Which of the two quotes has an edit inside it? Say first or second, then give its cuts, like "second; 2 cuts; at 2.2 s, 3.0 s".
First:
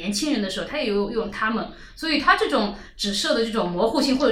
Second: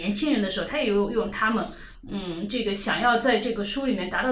second; 1 cut; at 1.9 s